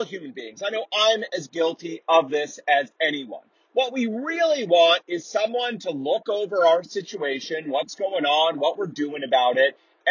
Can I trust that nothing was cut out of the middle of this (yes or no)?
yes